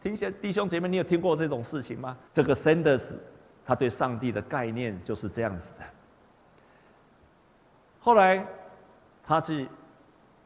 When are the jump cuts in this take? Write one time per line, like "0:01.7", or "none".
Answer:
0:02.3